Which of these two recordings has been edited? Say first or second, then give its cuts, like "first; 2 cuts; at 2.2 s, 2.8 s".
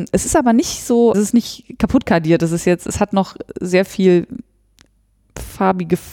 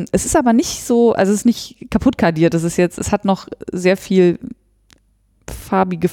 first; 1 cut; at 1.1 s